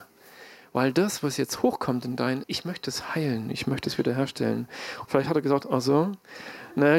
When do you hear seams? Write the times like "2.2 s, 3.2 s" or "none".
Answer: 2.4 s, 5.1 s